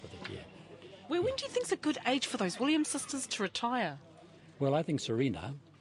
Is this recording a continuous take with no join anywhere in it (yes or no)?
yes